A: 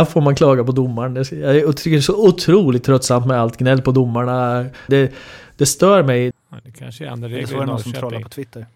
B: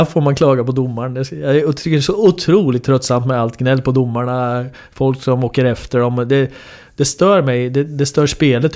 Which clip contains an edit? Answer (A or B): A